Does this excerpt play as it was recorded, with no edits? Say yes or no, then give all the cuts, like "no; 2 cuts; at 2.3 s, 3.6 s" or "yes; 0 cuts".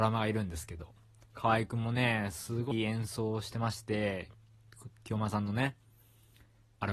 no; 1 cut; at 2.7 s